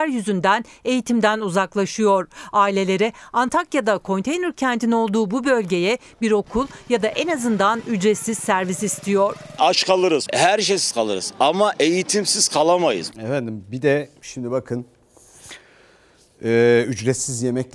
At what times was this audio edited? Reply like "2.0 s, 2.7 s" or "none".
10.3 s, 13.1 s